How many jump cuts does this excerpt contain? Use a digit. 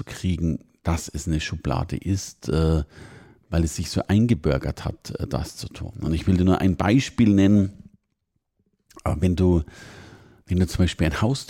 0